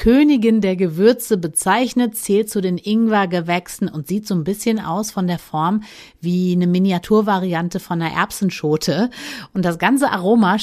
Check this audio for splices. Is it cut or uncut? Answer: uncut